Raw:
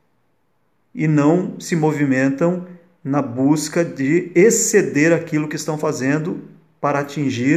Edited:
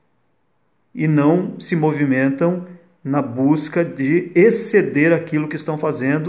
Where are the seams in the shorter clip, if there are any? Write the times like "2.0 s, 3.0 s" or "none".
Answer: none